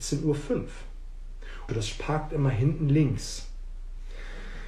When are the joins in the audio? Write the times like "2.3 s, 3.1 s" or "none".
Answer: 1.7 s